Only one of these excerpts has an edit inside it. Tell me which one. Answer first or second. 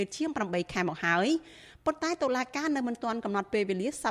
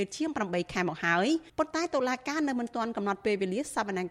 second